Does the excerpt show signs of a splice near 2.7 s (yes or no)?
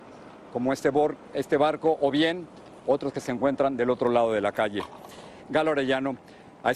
no